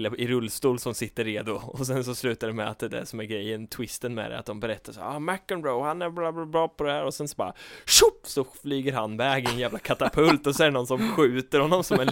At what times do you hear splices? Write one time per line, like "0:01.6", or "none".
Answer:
none